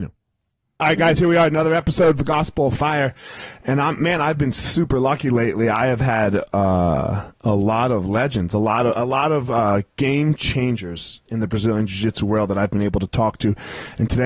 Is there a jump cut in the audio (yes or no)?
no